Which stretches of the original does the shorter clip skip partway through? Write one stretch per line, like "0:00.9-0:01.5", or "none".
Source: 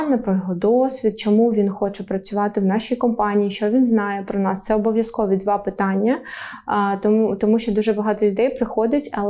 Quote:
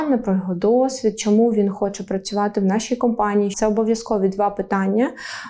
0:03.5-0:04.6